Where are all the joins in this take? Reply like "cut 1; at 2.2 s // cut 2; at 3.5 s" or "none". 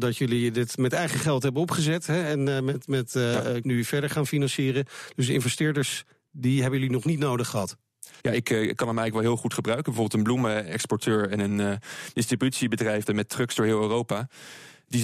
cut 1; at 3.6 s // cut 2; at 8.2 s // cut 3; at 13.1 s